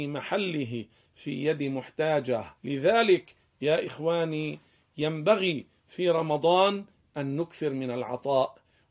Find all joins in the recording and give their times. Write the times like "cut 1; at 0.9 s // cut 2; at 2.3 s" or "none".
cut 1; at 2.6 s